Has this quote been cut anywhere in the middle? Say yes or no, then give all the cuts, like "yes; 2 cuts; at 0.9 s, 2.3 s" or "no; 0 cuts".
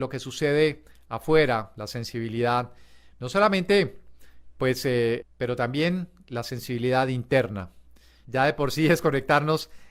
yes; 2 cuts; at 5.2 s, 8.3 s